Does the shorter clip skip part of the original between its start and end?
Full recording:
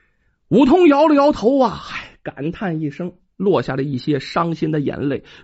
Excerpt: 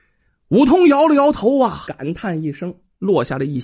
yes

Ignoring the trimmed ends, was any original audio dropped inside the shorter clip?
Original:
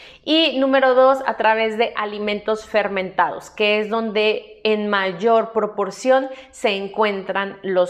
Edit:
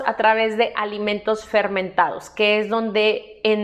no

